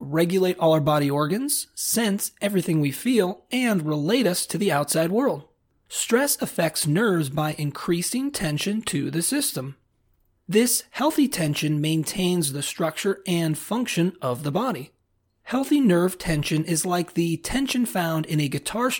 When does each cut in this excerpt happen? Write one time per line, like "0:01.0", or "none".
0:10.4